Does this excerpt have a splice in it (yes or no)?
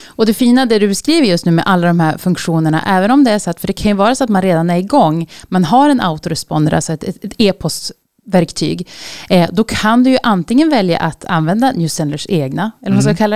no